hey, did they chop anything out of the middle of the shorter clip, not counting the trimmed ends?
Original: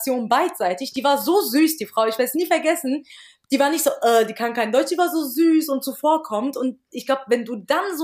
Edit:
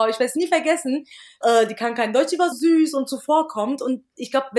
yes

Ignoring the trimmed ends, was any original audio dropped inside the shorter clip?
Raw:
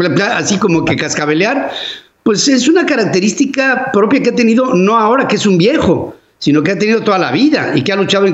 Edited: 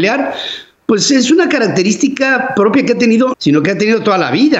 yes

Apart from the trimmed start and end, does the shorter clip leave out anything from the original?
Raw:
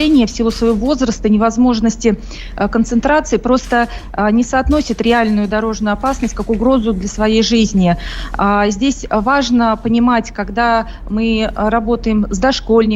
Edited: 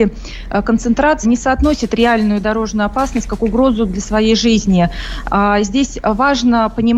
yes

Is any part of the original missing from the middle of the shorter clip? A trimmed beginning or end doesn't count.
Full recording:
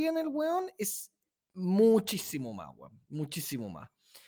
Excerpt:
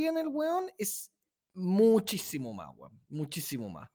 no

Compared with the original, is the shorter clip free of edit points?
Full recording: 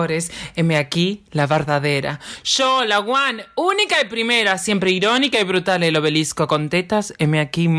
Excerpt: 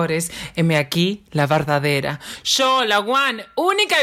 yes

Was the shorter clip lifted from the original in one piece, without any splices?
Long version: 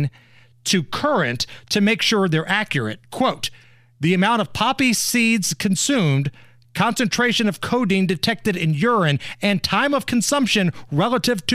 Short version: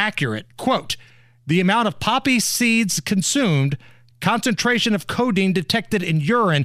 yes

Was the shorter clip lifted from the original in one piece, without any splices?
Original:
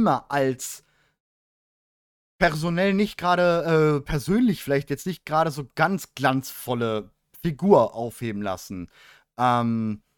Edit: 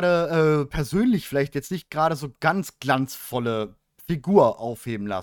yes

